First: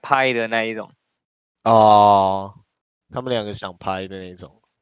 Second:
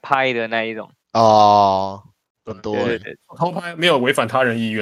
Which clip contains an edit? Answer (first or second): second